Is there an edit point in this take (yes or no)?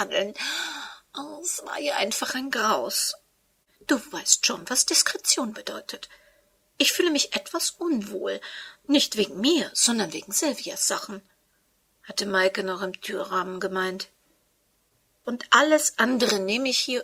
yes